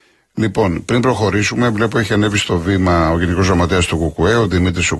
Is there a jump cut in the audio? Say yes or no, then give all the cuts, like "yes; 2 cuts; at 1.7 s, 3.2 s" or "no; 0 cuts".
no; 0 cuts